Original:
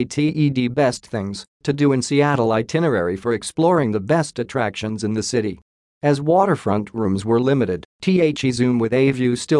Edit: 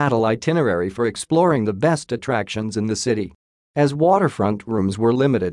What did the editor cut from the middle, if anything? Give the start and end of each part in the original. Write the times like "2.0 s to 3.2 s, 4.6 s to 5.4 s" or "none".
none